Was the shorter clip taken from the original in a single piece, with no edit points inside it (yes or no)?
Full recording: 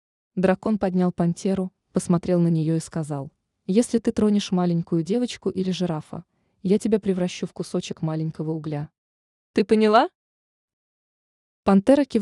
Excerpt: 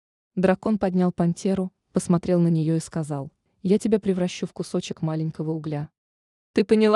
no